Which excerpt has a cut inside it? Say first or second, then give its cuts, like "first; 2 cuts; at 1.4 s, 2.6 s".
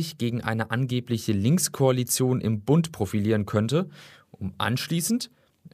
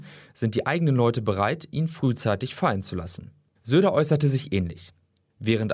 second; 1 cut; at 3.6 s